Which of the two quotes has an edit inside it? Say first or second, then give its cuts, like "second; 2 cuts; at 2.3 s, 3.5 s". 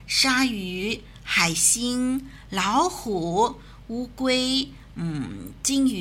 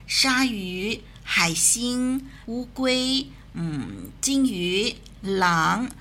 second; 1 cut; at 2.5 s